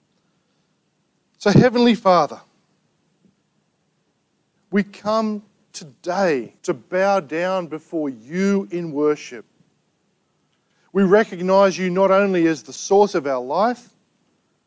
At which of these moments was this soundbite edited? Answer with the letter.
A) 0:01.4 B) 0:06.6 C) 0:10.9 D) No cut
B